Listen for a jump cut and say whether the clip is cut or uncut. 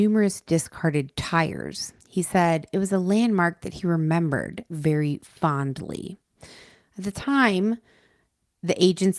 cut